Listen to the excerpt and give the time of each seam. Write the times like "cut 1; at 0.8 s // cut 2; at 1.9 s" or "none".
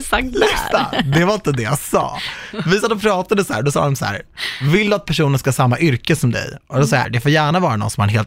cut 1; at 7.0 s